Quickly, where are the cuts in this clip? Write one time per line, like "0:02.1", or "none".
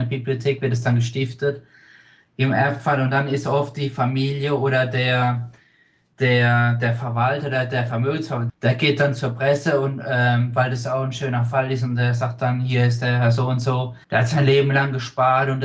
0:08.5
0:14.0